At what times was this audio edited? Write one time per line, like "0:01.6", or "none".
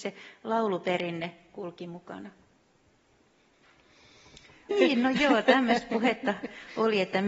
0:04.7